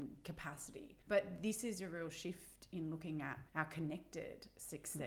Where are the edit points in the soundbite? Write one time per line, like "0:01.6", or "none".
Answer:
0:01.0
0:03.5